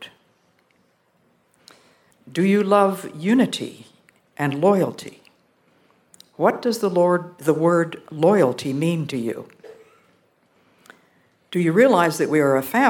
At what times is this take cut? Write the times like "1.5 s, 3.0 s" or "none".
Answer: 2.1 s